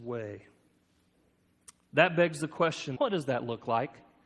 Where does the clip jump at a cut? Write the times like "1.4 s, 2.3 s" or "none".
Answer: 1.9 s, 3.0 s